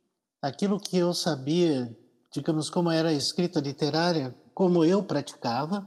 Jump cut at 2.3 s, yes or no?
no